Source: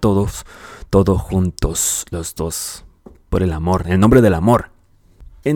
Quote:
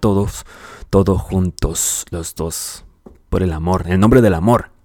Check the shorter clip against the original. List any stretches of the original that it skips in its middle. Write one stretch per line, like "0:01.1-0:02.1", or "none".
none